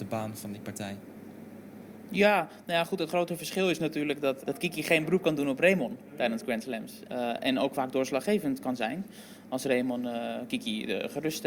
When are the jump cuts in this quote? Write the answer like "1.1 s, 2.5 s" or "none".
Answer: 4.4 s, 7.1 s